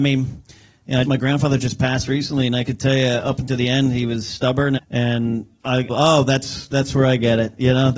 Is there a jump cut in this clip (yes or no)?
yes